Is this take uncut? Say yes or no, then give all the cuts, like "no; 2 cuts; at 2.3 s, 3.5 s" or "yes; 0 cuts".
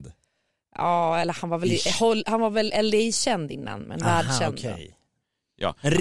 yes; 0 cuts